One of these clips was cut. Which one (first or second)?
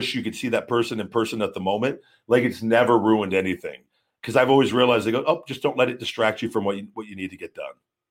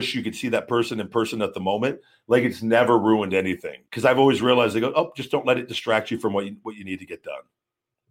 second